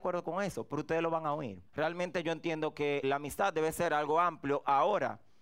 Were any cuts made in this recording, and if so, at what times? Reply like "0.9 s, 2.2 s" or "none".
1.7 s, 3.0 s